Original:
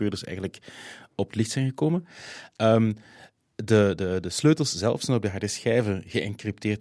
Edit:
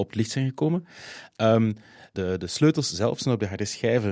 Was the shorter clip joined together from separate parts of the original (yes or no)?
yes